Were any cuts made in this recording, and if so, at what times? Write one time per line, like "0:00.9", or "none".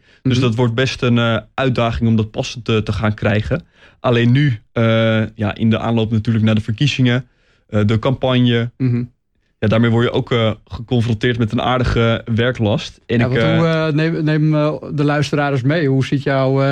none